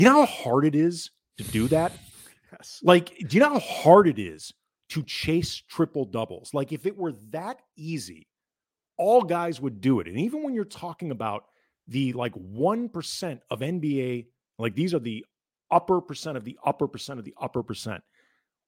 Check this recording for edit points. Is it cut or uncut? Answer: cut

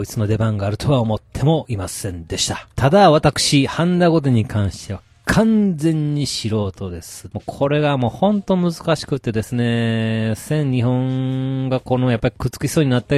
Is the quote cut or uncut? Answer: cut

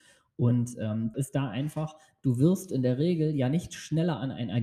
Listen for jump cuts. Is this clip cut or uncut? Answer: cut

